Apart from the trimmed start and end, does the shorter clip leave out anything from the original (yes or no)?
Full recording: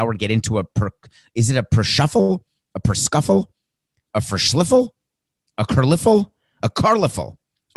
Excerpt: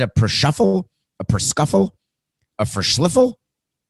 no